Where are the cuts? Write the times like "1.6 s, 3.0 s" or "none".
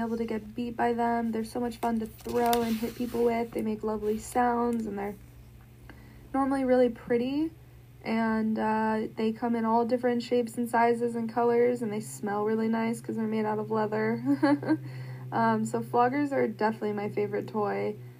none